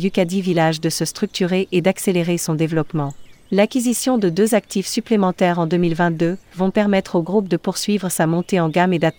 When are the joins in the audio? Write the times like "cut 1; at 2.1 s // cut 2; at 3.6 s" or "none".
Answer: cut 1; at 6.5 s